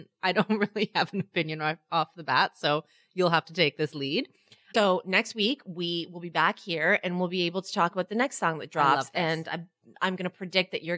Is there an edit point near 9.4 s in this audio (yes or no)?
no